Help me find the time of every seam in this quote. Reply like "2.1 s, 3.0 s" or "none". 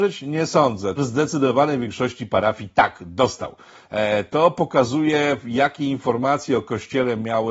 1.0 s